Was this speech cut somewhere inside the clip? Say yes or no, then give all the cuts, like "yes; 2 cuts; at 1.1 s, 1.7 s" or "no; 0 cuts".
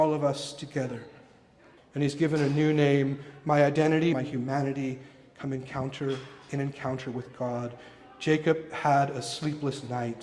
yes; 2 cuts; at 1.8 s, 4.1 s